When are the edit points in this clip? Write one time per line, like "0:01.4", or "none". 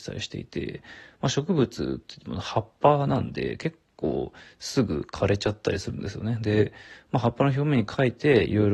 none